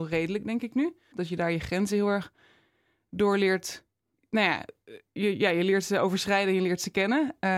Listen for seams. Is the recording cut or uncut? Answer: cut